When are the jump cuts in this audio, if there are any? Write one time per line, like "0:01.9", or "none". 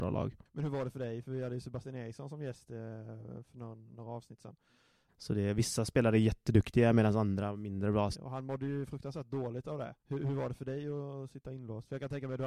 0:05.1
0:08.1
0:10.0